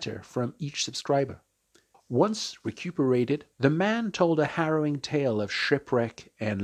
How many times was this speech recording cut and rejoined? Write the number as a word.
two